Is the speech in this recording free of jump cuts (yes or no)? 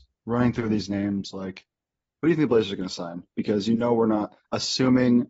yes